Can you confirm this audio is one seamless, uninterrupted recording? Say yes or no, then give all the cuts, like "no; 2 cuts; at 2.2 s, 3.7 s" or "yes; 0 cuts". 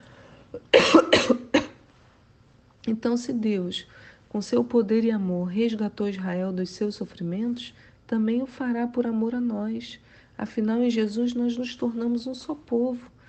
yes; 0 cuts